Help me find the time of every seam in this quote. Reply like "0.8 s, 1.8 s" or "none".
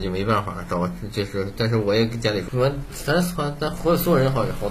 2.5 s